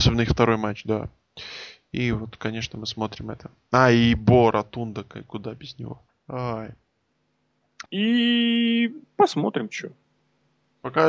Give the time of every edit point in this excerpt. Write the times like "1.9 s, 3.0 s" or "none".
6.1 s, 7.9 s